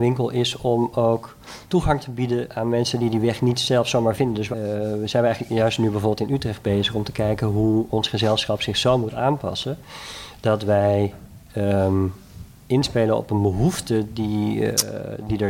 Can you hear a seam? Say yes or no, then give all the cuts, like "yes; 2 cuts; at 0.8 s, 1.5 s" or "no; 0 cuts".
no; 0 cuts